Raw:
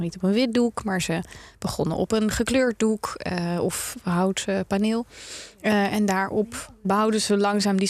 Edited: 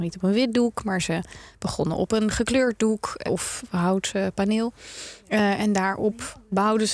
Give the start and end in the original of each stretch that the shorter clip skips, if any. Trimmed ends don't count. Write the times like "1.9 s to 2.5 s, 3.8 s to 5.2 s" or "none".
3.3 s to 3.6 s